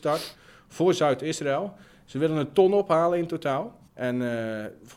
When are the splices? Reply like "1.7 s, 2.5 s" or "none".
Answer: 3.9 s